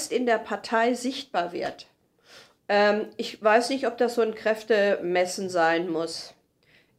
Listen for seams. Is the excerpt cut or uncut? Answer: cut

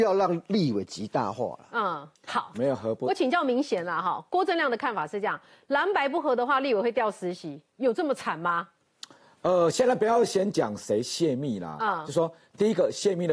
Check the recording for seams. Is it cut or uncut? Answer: cut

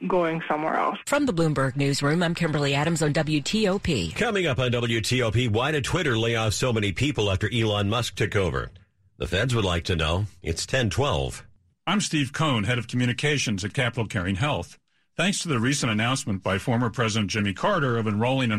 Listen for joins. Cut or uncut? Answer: uncut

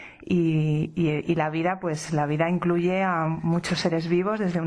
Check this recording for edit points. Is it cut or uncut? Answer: uncut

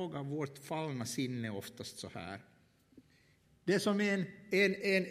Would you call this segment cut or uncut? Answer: cut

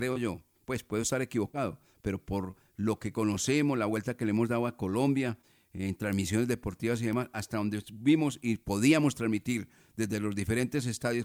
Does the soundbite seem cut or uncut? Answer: uncut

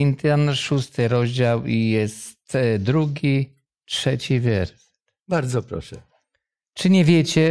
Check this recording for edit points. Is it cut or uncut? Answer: uncut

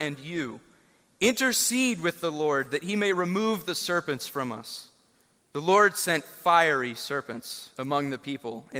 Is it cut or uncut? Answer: cut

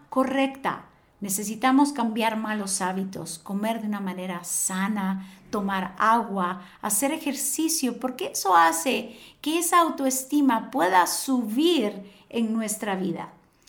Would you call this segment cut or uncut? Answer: uncut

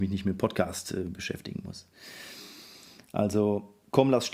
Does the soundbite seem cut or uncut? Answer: uncut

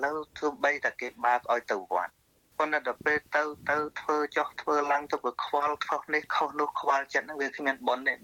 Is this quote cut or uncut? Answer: uncut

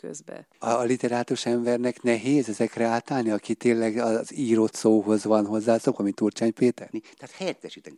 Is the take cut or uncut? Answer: cut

